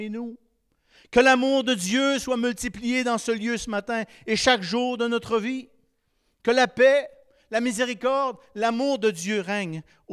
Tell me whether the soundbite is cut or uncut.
uncut